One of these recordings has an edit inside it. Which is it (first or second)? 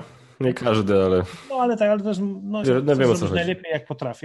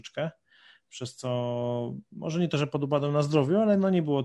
first